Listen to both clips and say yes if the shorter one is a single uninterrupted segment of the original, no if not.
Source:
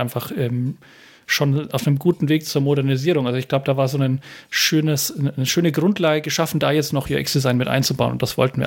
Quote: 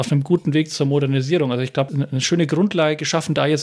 no